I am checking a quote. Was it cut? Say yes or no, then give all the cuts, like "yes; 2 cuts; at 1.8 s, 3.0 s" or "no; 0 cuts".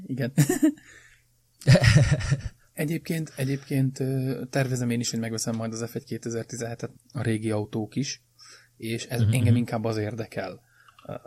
yes; 1 cut; at 6.9 s